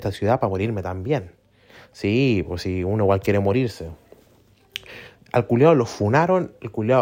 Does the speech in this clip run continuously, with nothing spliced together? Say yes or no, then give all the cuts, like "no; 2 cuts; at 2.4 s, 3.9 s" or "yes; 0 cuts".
no; 1 cut; at 5.2 s